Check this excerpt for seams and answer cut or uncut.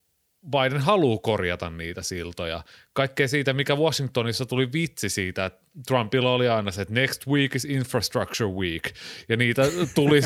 uncut